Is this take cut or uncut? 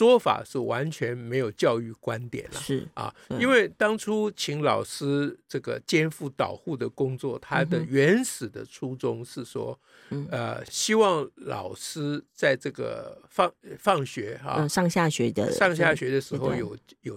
uncut